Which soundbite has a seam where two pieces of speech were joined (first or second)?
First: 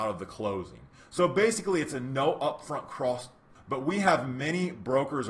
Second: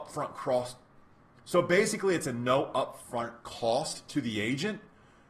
first